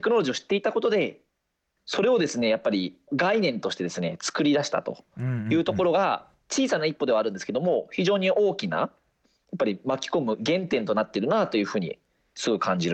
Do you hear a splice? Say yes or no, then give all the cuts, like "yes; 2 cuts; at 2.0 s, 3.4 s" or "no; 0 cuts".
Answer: no; 0 cuts